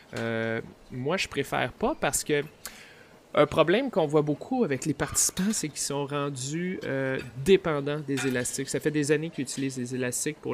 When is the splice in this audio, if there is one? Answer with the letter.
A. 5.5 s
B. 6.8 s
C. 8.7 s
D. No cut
D